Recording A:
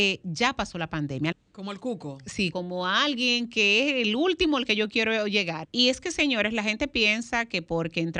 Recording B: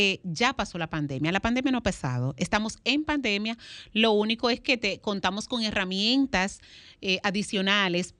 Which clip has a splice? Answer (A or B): A